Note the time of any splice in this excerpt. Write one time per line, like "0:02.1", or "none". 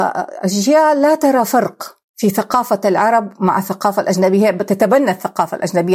0:02.1